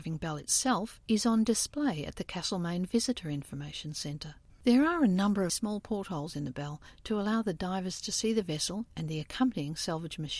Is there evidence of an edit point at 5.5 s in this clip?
yes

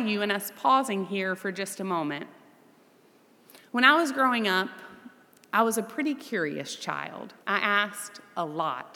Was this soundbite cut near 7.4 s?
yes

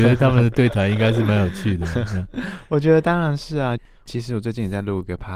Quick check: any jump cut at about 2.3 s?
no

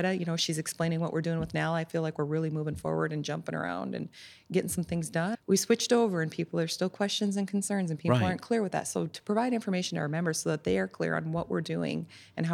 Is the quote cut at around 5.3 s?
yes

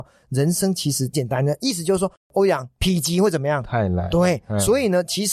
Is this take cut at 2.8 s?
yes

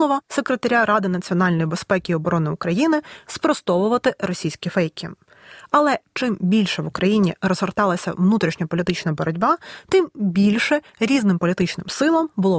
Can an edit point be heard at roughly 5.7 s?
no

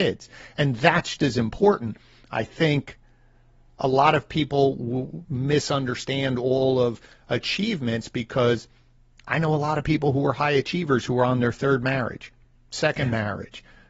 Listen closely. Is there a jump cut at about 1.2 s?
yes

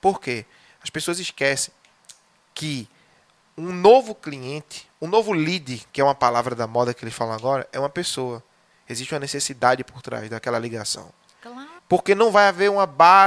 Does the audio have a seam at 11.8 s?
yes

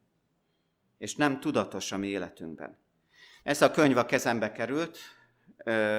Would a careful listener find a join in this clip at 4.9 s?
no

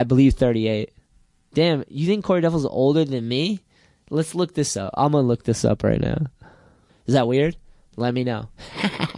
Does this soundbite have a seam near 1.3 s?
no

